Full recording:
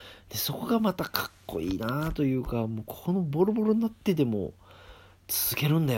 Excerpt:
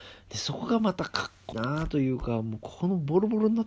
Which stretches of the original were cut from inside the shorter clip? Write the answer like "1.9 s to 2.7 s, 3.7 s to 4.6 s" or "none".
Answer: 1.5 s to 1.8 s